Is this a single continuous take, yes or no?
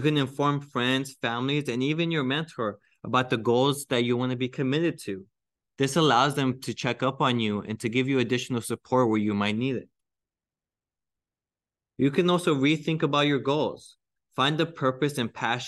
yes